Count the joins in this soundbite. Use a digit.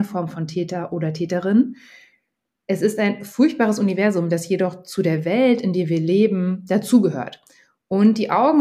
0